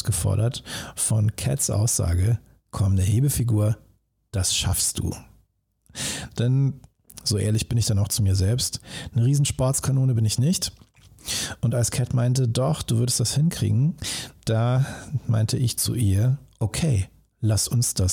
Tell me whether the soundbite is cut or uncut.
uncut